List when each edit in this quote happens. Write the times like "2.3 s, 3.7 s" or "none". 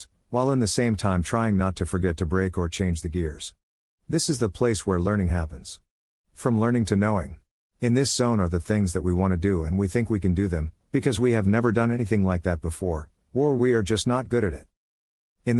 3.9 s, 7.7 s, 10.8 s